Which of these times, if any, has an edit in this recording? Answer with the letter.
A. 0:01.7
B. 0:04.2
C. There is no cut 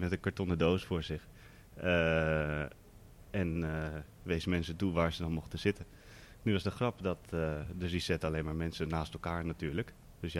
B